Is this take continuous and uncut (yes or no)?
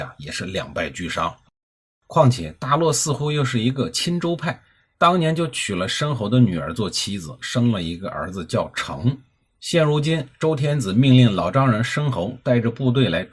yes